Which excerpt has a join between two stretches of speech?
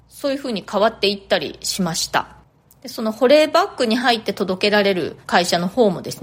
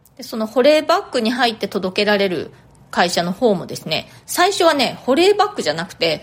first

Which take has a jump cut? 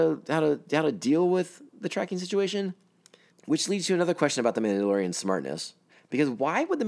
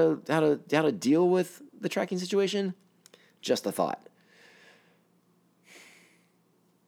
first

